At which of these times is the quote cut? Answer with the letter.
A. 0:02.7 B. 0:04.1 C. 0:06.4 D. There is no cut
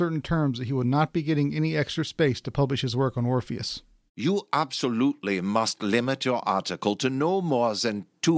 B